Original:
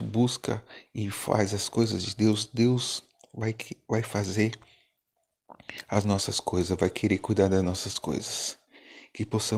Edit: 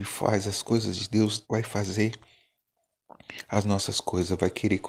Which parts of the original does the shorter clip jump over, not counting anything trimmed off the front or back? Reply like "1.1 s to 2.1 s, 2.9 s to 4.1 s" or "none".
2.5 s to 3.8 s